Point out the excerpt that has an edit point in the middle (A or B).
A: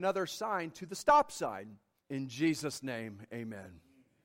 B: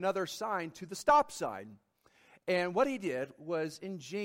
A